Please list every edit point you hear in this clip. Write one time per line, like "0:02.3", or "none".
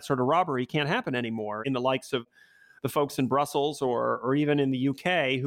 none

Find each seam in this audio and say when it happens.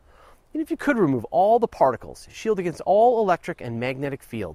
none

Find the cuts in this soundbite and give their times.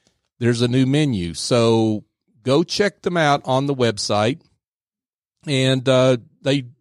none

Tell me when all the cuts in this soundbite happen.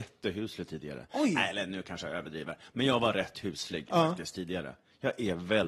none

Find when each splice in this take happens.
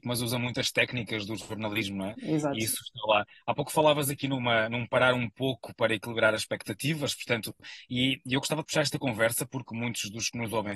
0:02.1

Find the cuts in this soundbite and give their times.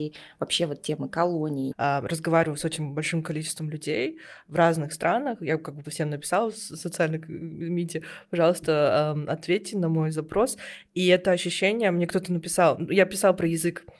0:01.7
0:05.8

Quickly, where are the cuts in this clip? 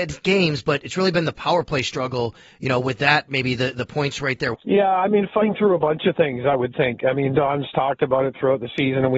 0:04.5

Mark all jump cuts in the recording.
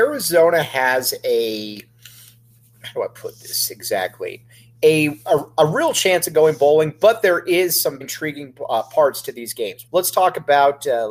0:08.0
0:09.9

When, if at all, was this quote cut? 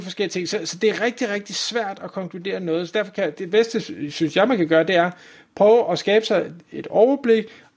none

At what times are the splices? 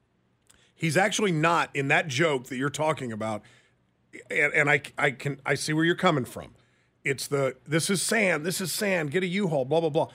none

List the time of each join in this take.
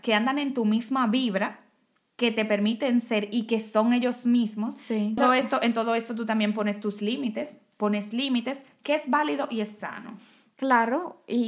0:05.2

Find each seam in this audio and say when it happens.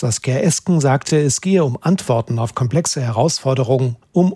none

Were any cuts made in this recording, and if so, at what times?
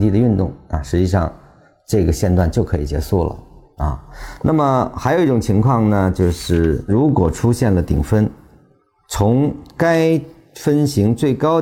none

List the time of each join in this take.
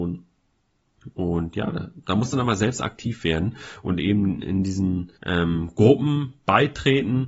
0:05.2

